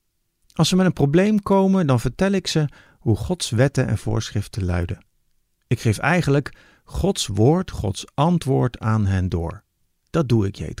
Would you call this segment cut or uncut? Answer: uncut